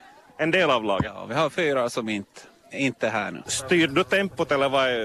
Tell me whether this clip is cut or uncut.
cut